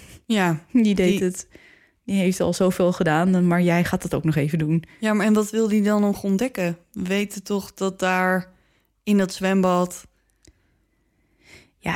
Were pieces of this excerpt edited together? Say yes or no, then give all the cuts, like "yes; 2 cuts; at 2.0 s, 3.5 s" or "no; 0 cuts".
no; 0 cuts